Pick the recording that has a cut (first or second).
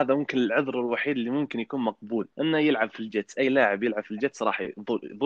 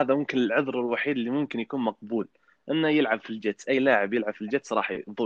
first